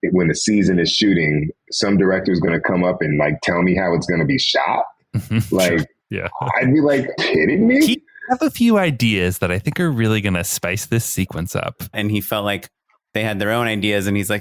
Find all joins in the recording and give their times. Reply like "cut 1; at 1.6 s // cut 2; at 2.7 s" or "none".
cut 1; at 7.2 s // cut 2; at 11.9 s